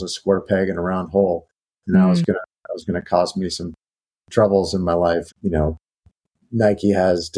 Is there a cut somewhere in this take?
yes; 1 cut; at 5.3 s

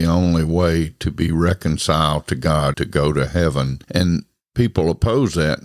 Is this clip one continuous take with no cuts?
no; 2 cuts; at 2.7 s, 3.8 s

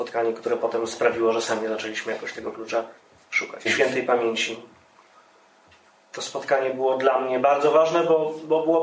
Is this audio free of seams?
no; 1 cut; at 3.6 s

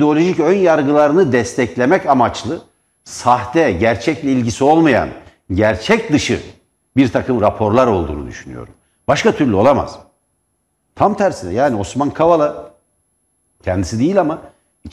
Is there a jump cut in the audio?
no; 0 cuts

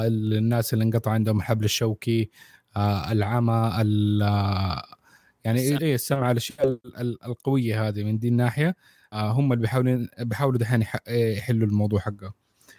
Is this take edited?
yes; 1 cut; at 5.8 s

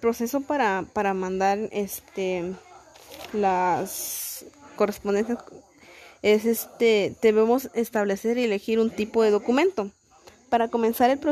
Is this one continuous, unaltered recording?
no; 1 cut; at 4.8 s

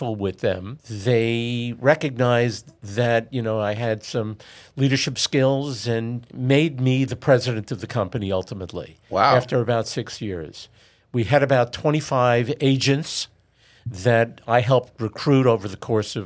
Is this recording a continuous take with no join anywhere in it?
yes; 0 cuts

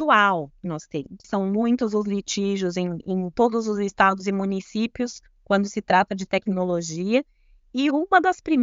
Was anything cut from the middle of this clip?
yes; 1 cut; at 1.2 s

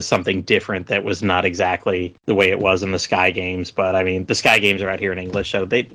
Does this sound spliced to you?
no; 0 cuts

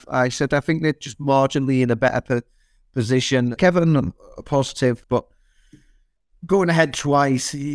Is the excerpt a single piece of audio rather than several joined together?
no; 2 cuts; at 3.6 s, 5.0 s

